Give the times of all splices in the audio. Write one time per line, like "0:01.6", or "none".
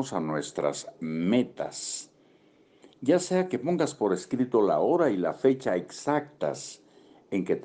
none

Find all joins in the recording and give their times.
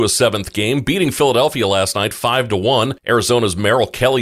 none

